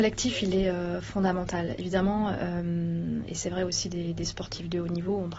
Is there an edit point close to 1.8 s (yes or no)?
no